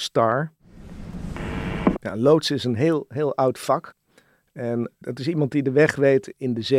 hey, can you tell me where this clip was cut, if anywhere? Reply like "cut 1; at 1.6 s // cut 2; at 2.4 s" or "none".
cut 1; at 1.9 s